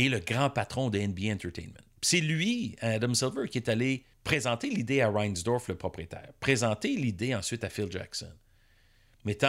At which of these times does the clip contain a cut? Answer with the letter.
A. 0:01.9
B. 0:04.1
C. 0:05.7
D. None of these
B